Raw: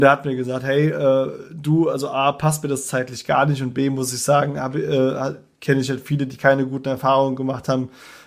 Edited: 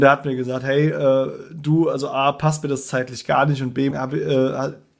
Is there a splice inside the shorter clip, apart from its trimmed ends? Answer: yes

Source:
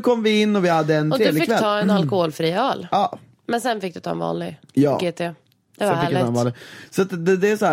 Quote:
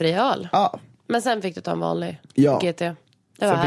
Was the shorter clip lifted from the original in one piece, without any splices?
yes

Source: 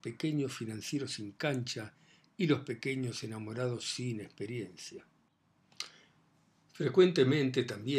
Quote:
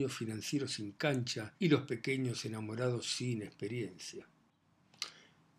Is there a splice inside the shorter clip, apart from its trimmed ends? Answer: yes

